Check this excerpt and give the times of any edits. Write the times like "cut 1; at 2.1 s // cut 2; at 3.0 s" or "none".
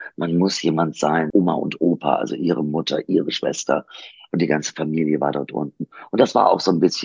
cut 1; at 1.3 s